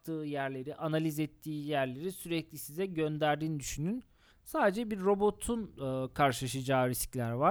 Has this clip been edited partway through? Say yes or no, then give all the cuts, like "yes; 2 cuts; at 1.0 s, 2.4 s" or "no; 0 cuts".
yes; 1 cut; at 4.3 s